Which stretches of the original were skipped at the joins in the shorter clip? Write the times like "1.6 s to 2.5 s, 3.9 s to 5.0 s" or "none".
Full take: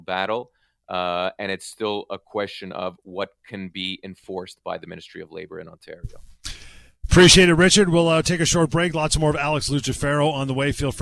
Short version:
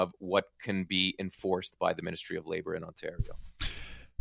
none